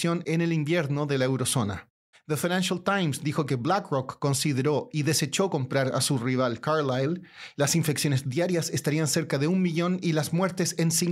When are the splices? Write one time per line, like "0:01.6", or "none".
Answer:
0:02.1
0:07.5